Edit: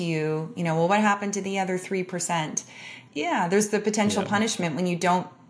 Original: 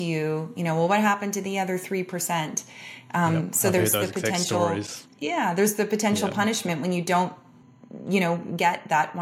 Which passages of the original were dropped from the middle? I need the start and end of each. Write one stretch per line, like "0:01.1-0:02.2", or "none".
0:03.1-0:05.1